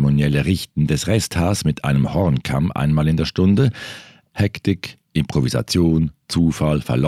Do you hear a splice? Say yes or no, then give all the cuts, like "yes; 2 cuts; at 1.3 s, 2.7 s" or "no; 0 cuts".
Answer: yes; 1 cut; at 4.3 s